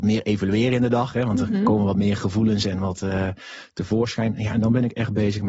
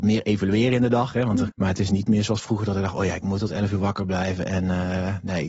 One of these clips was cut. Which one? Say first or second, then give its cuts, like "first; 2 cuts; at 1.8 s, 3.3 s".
second; 1 cut; at 1.5 s